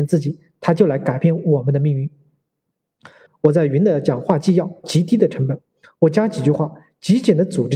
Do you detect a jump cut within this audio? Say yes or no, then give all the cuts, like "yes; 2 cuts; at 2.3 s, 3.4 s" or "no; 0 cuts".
yes; 2 cuts; at 3.3 s, 4.8 s